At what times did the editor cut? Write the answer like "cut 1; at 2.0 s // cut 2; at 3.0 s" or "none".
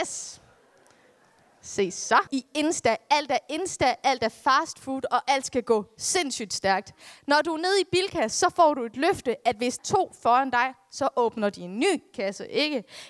cut 1; at 2.3 s // cut 2; at 9.8 s

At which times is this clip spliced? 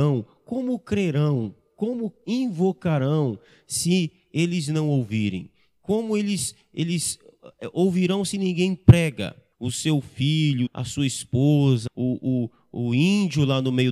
cut 1; at 9.5 s // cut 2; at 10.7 s // cut 3; at 11.9 s

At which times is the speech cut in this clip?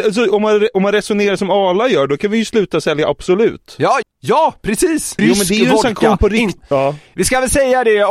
cut 1; at 4.0 s // cut 2; at 5.2 s // cut 3; at 6.6 s

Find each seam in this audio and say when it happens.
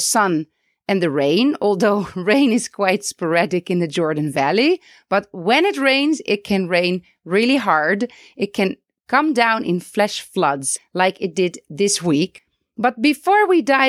none

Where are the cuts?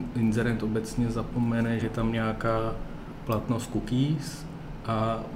cut 1; at 1.8 s

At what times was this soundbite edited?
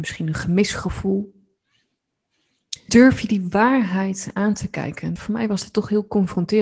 cut 1; at 2.9 s // cut 2; at 5.2 s

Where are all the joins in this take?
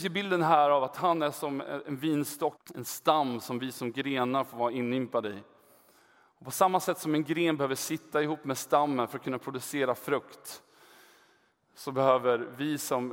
cut 1; at 2.6 s

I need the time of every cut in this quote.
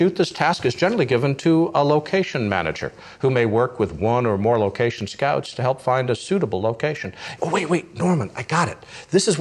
cut 1; at 7.4 s

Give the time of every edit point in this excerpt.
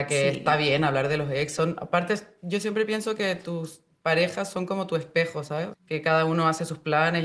cut 1; at 5.7 s

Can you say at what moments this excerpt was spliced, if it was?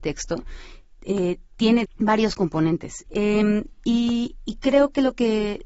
cut 1; at 1.8 s // cut 2; at 3.1 s

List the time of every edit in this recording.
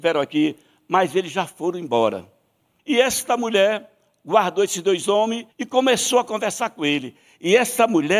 cut 1; at 2.8 s // cut 2; at 5.5 s

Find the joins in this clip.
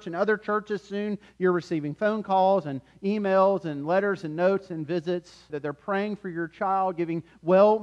cut 1; at 5.5 s

